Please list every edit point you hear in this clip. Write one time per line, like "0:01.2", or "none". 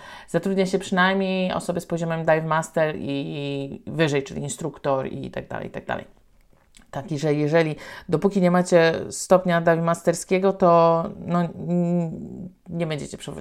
none